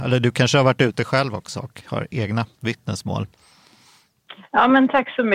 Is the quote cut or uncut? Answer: uncut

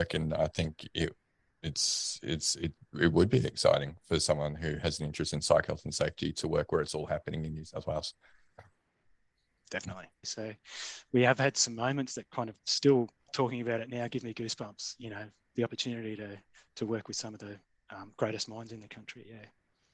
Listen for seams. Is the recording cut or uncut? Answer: cut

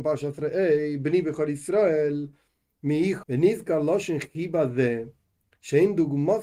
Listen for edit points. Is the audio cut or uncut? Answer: cut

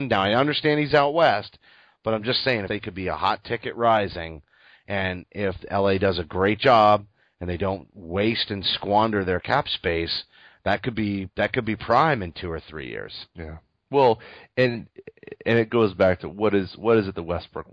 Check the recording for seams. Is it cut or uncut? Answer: cut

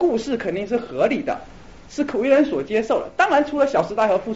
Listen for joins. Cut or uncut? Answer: uncut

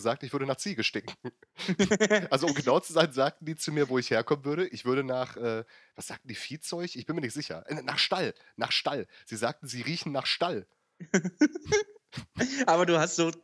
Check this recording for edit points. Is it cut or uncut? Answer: uncut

